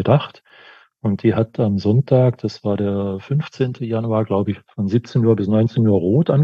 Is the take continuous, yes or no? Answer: yes